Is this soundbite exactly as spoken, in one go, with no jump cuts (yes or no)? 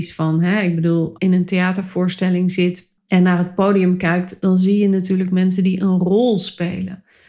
no